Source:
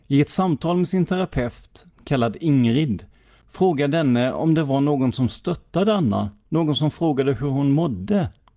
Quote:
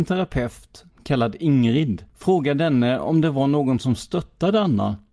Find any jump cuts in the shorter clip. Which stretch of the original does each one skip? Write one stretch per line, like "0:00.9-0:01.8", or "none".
0:03.1-0:03.4